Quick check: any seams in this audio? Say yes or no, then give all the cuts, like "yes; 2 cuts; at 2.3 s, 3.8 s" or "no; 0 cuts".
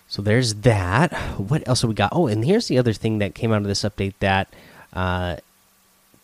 no; 0 cuts